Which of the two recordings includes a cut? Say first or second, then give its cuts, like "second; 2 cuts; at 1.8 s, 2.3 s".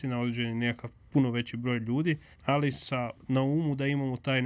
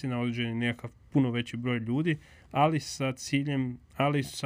first; 1 cut; at 2.3 s